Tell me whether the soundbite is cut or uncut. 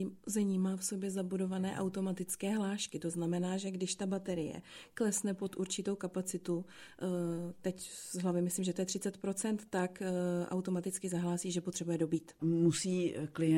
cut